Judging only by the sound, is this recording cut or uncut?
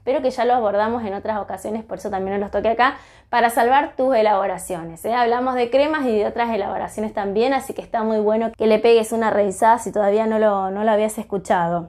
cut